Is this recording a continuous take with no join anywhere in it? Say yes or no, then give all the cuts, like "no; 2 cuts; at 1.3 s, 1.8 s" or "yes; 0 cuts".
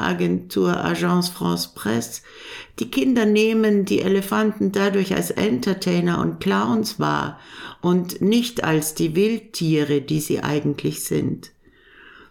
yes; 0 cuts